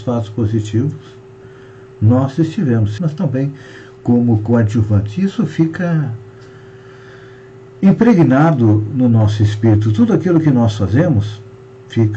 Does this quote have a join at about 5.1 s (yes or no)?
no